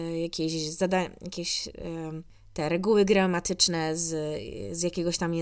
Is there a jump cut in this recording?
no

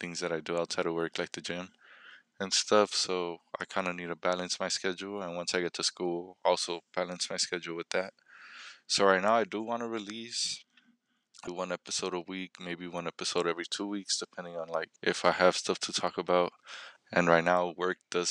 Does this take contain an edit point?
yes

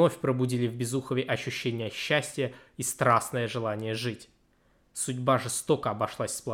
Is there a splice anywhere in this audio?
no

